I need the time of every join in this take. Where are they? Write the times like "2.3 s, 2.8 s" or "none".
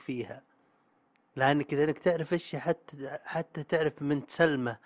none